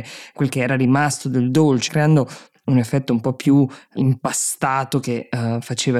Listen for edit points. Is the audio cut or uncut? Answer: cut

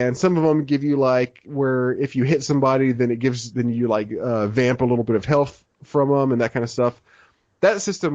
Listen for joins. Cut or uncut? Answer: uncut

